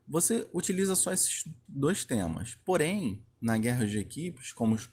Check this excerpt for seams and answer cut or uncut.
cut